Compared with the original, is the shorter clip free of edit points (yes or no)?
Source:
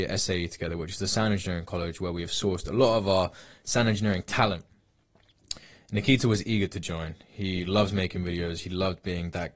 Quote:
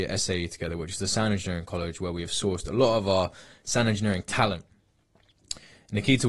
yes